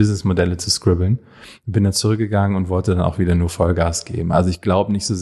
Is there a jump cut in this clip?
no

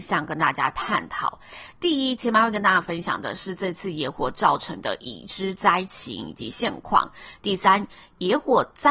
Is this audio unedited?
no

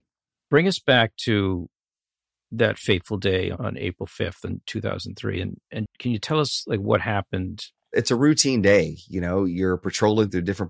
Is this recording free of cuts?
no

